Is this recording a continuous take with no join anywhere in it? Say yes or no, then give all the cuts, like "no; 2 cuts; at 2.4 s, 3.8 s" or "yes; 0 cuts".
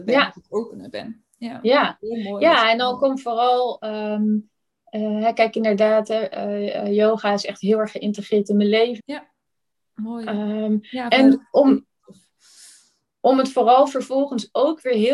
no; 1 cut; at 9.0 s